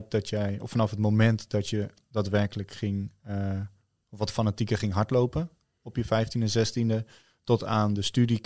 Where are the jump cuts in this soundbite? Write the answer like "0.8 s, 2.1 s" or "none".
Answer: none